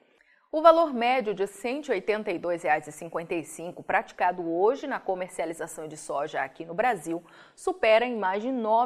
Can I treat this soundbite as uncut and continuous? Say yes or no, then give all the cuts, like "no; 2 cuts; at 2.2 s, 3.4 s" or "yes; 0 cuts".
yes; 0 cuts